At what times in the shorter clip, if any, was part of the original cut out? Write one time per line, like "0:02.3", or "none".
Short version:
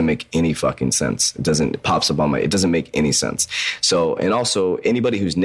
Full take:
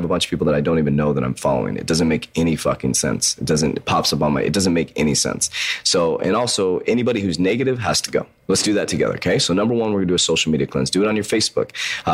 none